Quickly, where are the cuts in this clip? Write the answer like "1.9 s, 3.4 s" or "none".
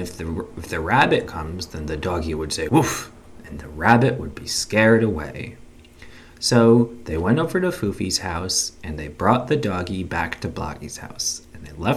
2.7 s